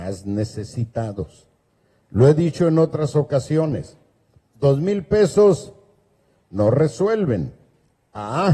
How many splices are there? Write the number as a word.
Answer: zero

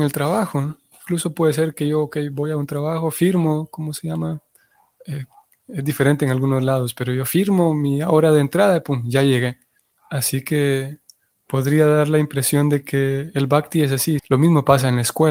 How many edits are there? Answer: two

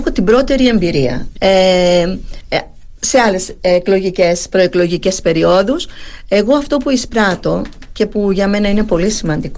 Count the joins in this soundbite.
one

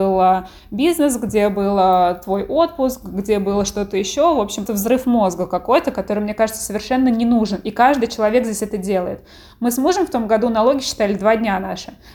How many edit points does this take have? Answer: one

